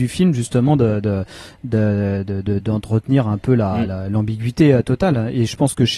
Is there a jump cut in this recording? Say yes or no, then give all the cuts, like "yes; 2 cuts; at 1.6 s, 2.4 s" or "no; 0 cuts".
no; 0 cuts